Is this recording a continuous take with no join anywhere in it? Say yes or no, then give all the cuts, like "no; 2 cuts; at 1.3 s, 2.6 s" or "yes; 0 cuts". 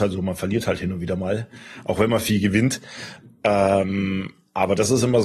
yes; 0 cuts